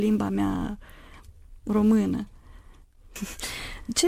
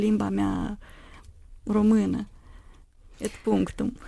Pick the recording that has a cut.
first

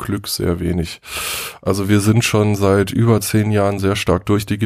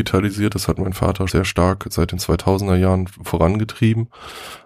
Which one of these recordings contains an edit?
second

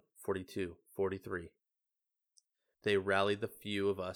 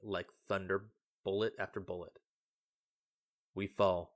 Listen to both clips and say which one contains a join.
first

